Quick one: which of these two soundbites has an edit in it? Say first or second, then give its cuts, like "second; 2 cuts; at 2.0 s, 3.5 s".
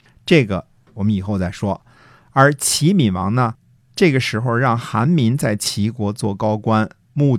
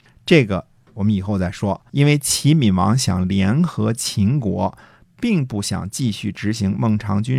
second; 1 cut; at 1.9 s